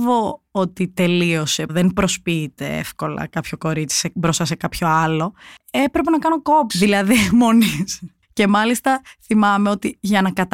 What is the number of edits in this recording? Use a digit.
2